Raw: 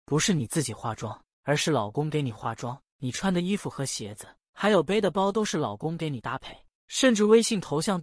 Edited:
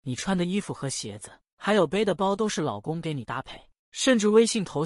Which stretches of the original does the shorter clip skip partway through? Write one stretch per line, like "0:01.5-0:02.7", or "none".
none